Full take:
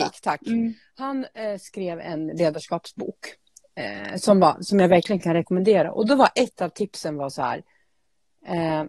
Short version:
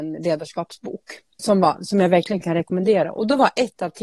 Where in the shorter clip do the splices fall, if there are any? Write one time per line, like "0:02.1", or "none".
0:01.4